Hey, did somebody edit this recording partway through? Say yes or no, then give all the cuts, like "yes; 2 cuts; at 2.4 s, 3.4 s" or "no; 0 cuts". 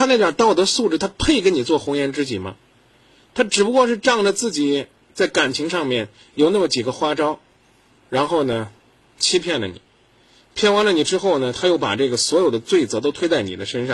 no; 0 cuts